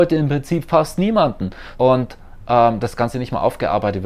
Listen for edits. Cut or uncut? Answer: cut